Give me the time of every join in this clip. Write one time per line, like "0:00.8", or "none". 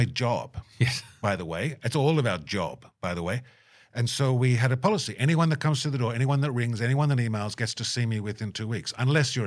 none